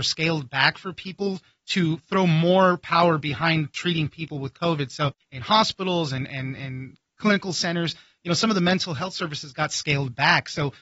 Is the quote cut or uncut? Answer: uncut